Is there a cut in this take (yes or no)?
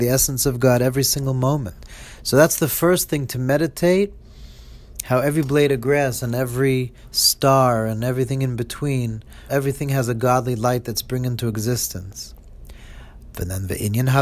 yes